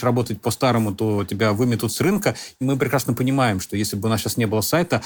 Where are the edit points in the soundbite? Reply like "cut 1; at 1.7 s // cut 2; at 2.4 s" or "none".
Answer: cut 1; at 2.6 s